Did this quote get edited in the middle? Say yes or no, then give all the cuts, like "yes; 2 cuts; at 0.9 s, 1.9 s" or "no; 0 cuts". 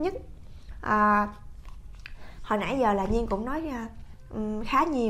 no; 0 cuts